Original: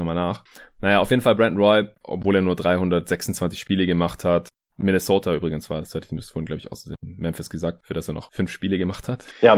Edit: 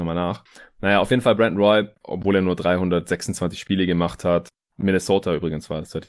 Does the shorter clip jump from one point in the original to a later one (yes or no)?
no